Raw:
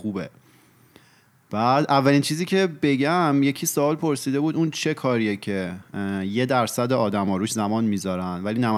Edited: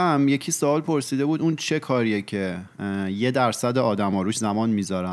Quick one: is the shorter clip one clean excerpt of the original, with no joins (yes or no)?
yes